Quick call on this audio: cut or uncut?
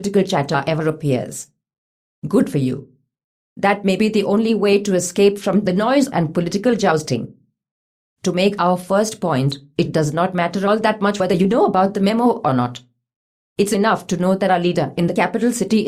uncut